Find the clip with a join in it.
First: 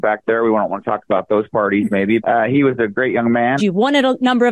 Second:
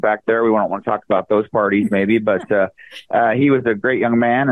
first; 2 cuts; at 2.2 s, 3.6 s

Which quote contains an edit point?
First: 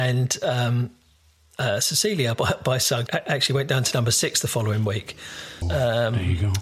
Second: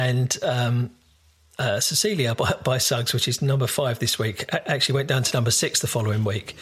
first; 2 cuts; at 3.1 s, 5.6 s

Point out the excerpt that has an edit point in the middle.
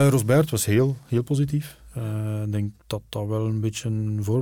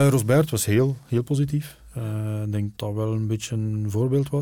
second; 1 cut; at 2.8 s

